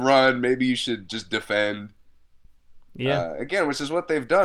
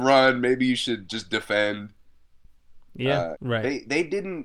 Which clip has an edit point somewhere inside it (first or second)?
second